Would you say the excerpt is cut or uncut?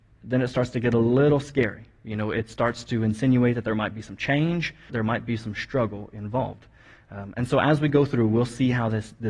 cut